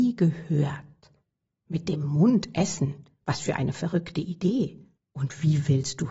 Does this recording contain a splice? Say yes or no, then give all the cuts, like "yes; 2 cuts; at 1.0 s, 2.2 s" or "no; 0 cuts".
yes; 1 cut; at 5.0 s